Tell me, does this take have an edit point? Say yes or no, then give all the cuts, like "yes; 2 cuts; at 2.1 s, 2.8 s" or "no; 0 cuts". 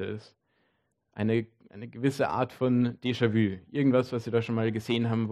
no; 0 cuts